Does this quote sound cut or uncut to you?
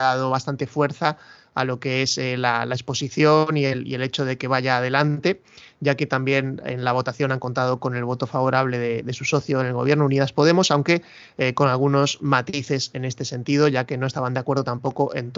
uncut